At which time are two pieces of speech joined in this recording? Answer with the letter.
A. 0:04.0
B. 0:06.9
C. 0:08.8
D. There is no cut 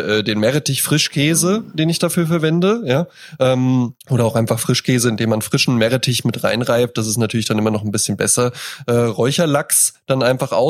A